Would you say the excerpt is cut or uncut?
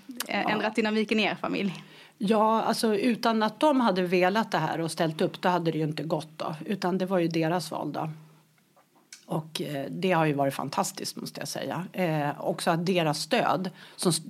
uncut